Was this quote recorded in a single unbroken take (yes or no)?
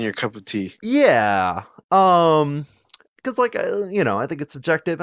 yes